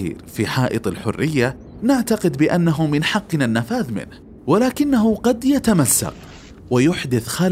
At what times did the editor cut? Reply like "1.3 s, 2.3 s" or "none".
4.4 s